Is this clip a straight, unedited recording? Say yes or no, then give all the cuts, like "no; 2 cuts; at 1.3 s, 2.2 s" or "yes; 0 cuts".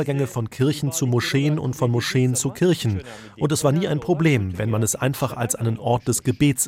yes; 0 cuts